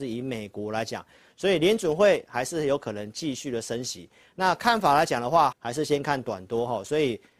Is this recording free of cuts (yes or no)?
no